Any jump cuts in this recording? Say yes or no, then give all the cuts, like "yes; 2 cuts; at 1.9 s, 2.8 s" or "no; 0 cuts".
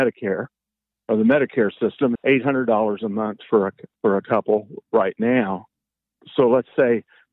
yes; 1 cut; at 2.2 s